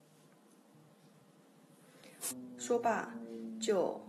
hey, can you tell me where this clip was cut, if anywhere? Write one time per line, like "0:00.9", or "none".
0:02.3